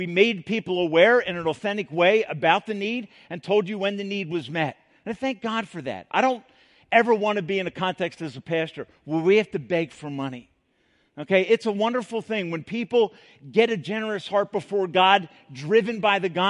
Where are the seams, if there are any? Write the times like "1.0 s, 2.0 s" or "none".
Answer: none